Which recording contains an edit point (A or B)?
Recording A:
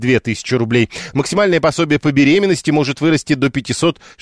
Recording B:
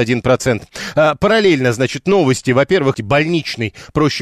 B